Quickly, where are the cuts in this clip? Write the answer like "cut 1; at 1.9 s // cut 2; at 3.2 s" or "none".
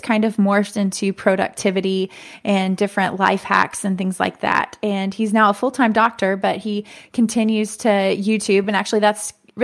none

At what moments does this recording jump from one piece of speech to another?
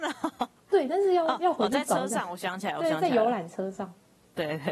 none

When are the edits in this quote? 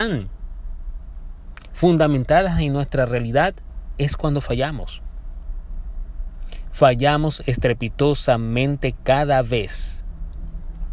none

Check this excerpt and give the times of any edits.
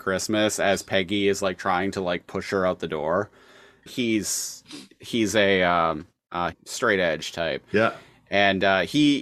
cut 1; at 3.9 s // cut 2; at 6.5 s

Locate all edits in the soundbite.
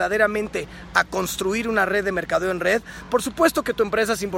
none

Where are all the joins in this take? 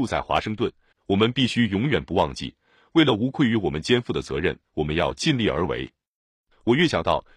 cut 1; at 0.9 s

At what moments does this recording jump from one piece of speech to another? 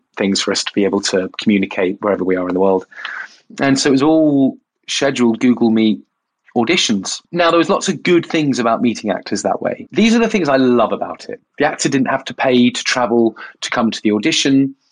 cut 1; at 11.5 s

